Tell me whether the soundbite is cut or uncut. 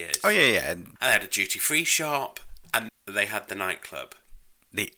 cut